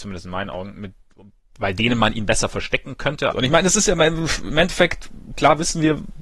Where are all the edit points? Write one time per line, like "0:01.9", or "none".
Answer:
0:03.3